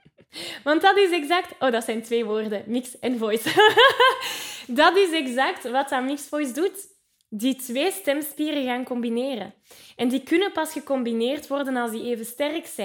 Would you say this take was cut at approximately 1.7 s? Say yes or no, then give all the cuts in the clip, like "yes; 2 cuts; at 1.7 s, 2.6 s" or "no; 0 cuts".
no; 0 cuts